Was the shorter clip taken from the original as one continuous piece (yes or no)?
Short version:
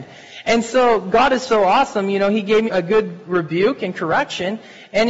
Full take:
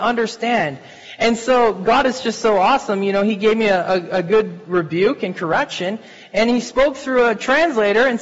no